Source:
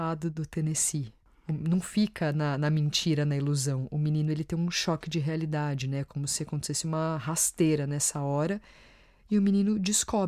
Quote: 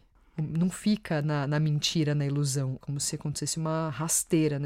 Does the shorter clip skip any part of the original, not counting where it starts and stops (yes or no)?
yes